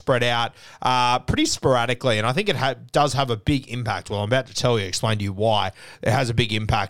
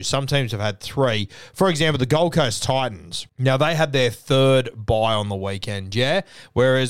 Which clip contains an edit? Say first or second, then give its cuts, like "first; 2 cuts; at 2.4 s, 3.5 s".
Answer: second; 1 cut; at 3.3 s